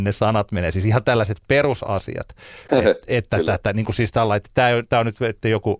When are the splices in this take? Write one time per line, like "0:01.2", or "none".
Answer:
0:02.7

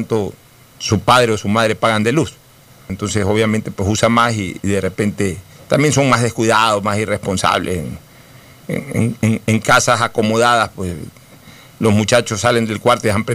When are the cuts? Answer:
0:02.9

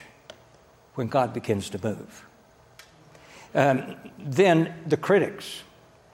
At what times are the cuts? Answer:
none

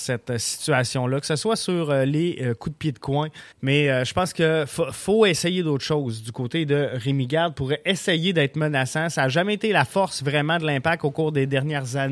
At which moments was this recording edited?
0:03.5

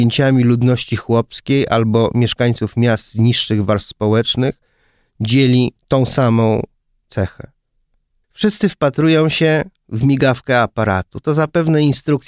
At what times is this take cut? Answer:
0:05.8

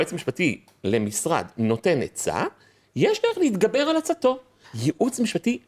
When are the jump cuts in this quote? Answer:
0:04.6

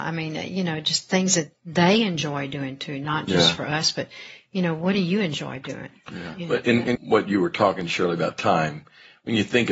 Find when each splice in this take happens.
0:07.0

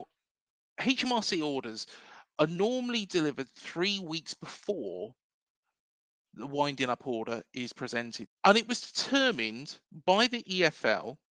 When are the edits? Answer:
0:08.3
0:09.8

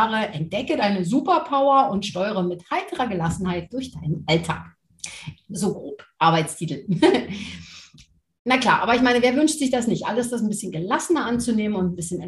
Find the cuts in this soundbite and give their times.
none

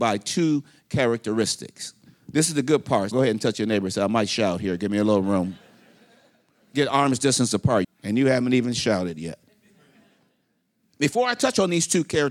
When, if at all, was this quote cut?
0:03.1
0:07.8

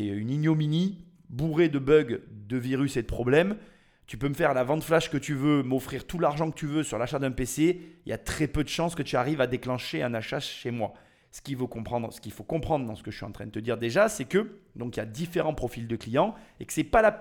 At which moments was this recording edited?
0:11.2

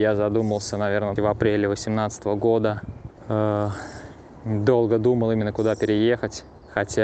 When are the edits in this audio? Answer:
0:01.2

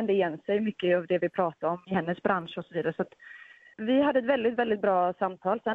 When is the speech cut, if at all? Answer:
0:01.8
0:03.7

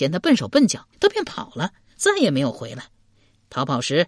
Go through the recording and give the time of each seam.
0:00.9

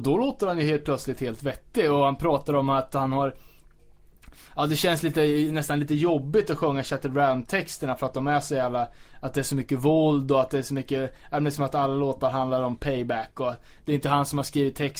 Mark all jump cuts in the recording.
none

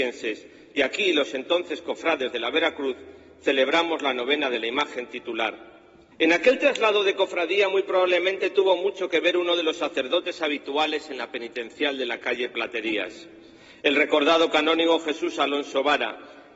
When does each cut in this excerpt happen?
0:06.1

